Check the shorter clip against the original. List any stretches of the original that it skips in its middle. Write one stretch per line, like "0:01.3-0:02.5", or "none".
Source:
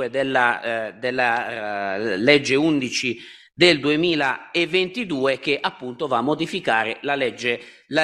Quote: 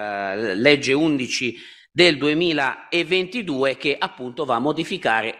none